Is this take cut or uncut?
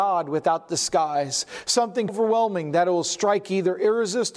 cut